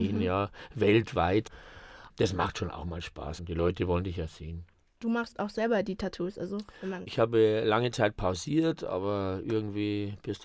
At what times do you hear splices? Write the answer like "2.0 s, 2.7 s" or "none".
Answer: 3.4 s, 7.1 s